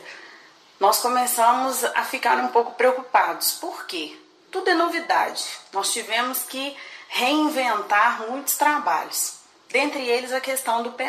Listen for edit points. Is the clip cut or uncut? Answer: uncut